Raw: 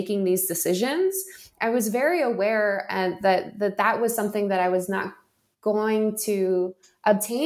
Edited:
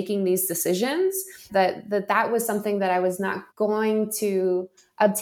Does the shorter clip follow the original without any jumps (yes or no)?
no